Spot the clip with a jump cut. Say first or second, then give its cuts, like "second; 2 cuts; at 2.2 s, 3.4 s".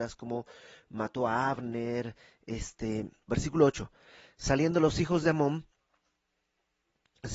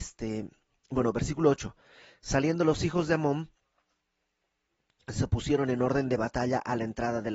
first; 1 cut; at 3.3 s